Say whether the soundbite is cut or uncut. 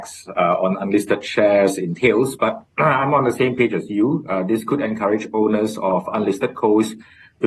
uncut